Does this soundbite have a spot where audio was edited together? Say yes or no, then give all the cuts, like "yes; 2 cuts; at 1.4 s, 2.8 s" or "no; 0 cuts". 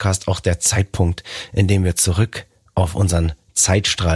no; 0 cuts